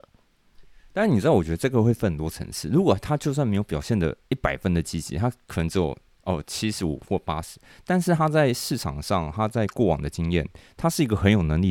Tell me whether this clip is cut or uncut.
uncut